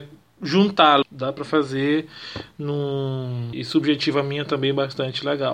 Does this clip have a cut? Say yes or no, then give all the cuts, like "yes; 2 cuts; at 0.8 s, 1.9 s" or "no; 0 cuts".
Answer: yes; 2 cuts; at 1.0 s, 3.5 s